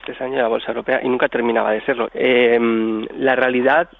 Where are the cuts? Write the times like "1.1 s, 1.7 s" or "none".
2.1 s